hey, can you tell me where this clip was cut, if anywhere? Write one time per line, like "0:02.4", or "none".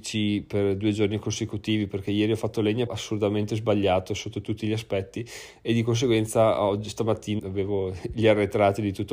0:02.9
0:07.4